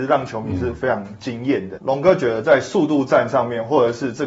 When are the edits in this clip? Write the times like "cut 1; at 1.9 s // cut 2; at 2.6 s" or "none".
cut 1; at 1.8 s